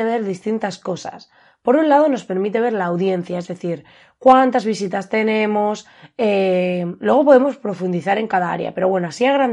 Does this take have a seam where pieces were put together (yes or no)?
no